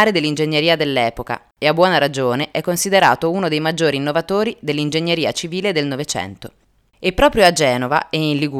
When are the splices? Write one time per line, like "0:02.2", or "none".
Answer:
0:06.9